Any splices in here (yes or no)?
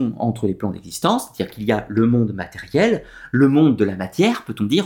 no